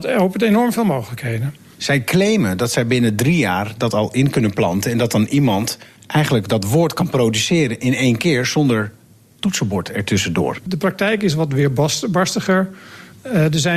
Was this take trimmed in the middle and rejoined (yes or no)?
yes